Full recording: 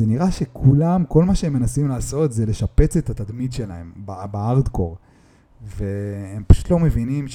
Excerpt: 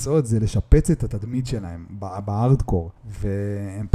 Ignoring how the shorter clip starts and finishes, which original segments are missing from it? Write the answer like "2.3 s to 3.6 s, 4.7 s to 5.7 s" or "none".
5.0 s to 5.5 s